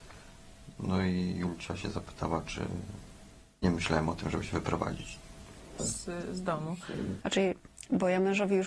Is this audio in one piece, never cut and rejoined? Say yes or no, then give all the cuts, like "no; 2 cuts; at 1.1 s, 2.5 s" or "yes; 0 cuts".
no; 2 cuts; at 5.8 s, 7.2 s